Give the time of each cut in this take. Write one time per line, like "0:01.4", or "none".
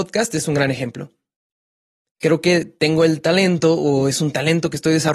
none